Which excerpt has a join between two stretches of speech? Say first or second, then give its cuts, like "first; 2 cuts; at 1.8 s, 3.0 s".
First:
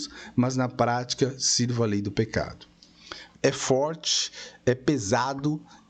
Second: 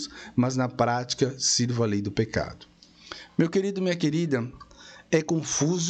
first; 1 cut; at 3.3 s